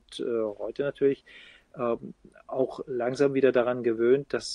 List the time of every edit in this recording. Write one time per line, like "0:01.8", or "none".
none